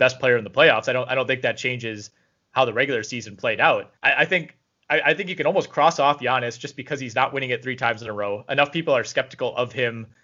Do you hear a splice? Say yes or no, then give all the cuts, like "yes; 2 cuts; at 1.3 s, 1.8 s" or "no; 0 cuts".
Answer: yes; 1 cut; at 4.0 s